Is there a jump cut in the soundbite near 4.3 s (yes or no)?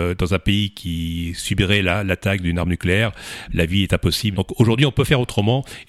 yes